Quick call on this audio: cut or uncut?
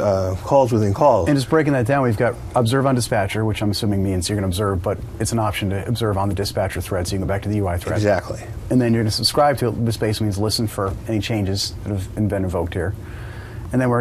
uncut